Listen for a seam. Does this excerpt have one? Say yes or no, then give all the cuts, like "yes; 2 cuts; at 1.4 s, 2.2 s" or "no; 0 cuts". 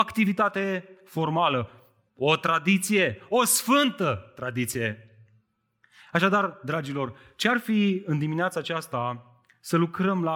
no; 0 cuts